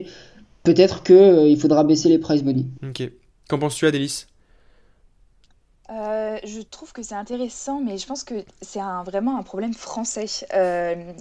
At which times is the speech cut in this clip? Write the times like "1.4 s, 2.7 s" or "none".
2.8 s